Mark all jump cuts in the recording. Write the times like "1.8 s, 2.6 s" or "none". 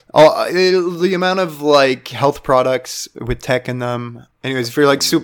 4.3 s